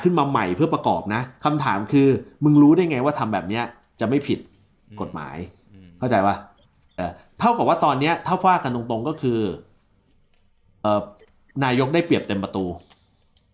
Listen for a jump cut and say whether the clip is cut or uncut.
cut